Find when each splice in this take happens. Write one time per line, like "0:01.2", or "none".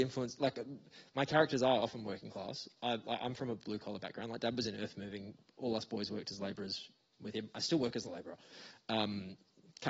none